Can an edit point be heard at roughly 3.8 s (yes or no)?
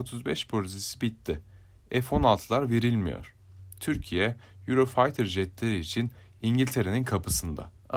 no